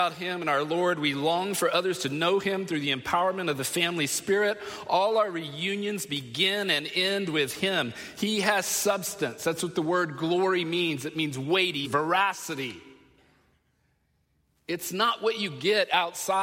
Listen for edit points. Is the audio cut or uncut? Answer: cut